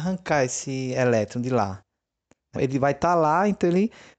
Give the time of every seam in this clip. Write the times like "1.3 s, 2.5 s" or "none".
2.6 s